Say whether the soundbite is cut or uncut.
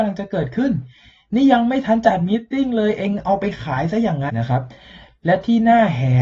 cut